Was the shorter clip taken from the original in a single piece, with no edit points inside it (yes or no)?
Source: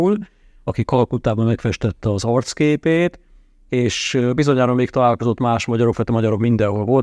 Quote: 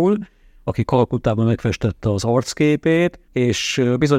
no